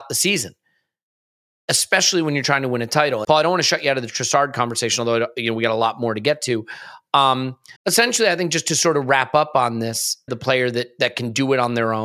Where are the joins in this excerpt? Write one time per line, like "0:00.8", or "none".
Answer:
0:03.2
0:07.8
0:10.3